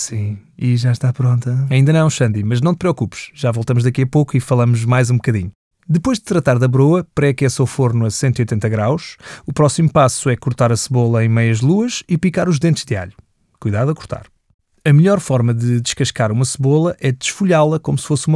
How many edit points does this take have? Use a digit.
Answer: 0